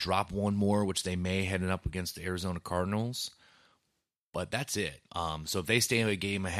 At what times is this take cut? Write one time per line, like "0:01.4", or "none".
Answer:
0:05.1